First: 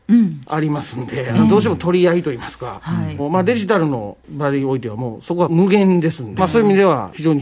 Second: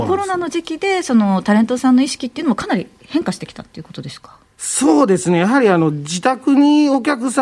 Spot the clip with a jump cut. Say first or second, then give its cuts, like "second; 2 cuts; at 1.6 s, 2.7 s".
first; 2 cuts; at 3.2 s, 6.4 s